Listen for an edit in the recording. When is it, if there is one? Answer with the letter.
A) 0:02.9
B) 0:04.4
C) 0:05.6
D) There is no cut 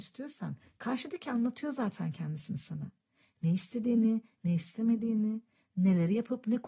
D